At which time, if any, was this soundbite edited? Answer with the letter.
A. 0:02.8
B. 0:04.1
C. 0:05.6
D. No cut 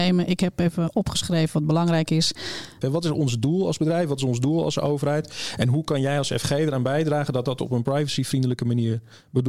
A